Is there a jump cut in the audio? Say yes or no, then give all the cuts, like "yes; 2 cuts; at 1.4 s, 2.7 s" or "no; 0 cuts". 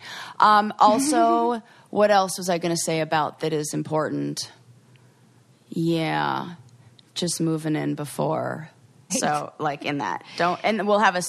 yes; 2 cuts; at 3.4 s, 9.1 s